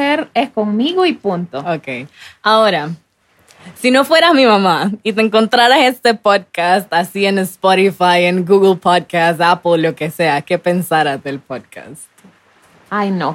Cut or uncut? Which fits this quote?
uncut